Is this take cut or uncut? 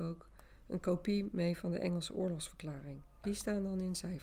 cut